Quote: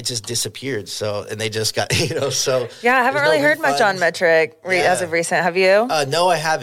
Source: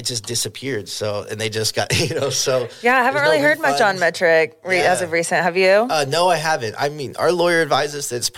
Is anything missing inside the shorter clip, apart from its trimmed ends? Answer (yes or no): no